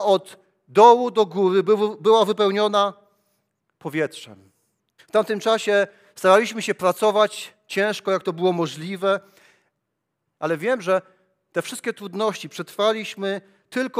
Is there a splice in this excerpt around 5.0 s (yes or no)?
yes